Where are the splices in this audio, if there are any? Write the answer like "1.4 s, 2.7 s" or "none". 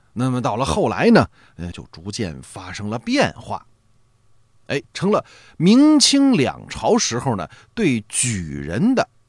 1.7 s